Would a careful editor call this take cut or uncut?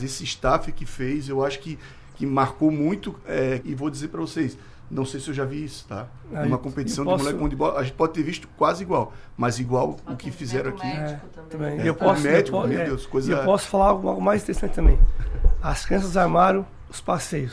cut